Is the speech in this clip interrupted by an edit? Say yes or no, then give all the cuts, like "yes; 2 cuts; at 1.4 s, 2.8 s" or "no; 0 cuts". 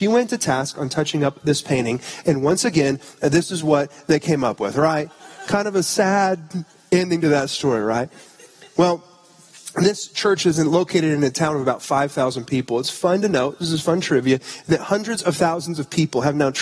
no; 0 cuts